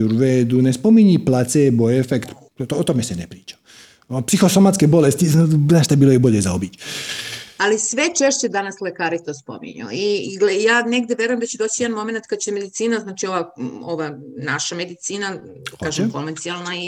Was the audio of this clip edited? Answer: no; 0 cuts

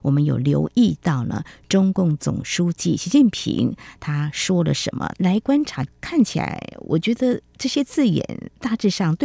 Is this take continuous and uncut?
no; 1 cut; at 5.1 s

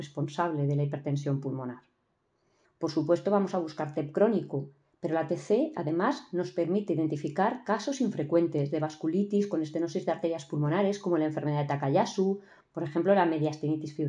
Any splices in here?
yes; 2 cuts; at 2.6 s, 12.6 s

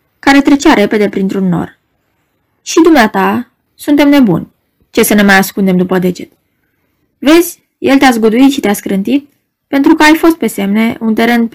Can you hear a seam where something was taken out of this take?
yes; 1 cut; at 3.7 s

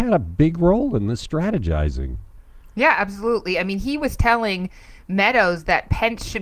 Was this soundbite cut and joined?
no; 0 cuts

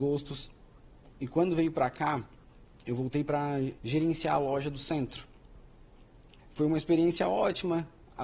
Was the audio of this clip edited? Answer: yes; 2 cuts; at 3.8 s, 6.4 s

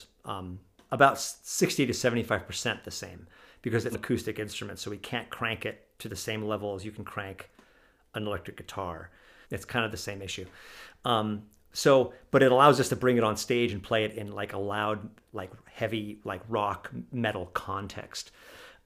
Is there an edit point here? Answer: yes; 2 cuts; at 3.9 s, 9.4 s

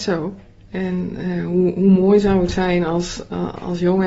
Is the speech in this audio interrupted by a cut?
no; 0 cuts

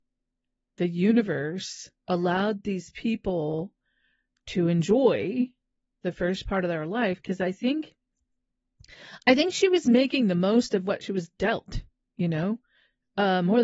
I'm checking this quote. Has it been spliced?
yes; 1 cut; at 2.0 s

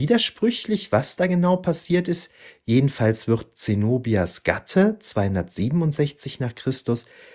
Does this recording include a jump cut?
no; 0 cuts

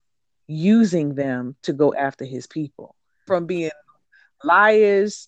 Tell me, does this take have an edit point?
yes; 1 cut; at 3.3 s

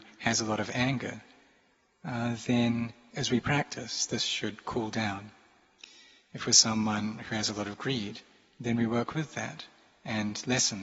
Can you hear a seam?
no; 0 cuts

